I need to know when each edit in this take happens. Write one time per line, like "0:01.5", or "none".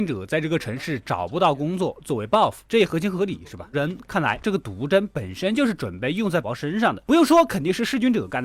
0:03.7
0:06.4